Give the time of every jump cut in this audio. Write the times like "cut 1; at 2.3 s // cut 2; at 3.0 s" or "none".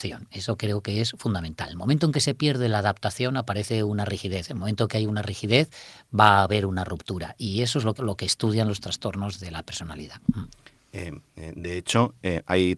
cut 1; at 8.0 s